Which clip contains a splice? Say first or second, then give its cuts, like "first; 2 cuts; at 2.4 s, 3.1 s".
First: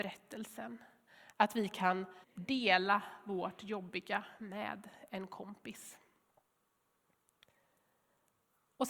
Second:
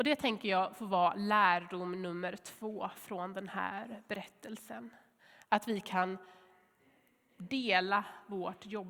first; 1 cut; at 2.2 s